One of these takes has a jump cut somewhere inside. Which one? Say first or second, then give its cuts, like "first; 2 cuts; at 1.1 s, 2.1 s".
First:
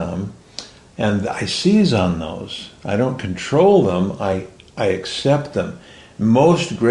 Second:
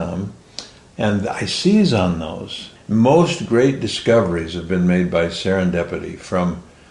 second; 1 cut; at 2.8 s